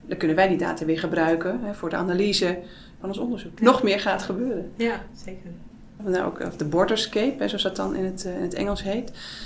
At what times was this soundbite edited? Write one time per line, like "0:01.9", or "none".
0:03.6
0:06.0